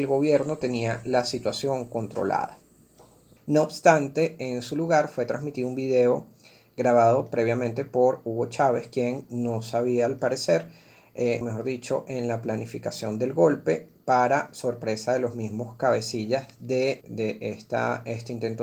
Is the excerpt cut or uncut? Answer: cut